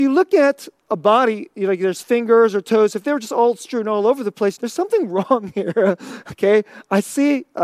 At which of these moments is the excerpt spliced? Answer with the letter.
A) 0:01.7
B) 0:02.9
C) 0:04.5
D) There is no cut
C